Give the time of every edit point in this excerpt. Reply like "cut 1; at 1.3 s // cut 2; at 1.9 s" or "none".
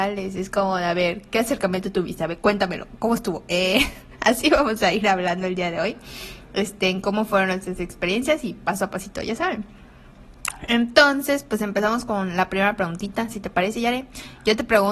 none